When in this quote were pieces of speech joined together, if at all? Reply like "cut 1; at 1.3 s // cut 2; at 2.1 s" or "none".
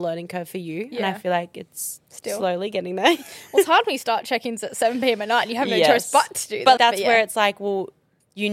cut 1; at 6.8 s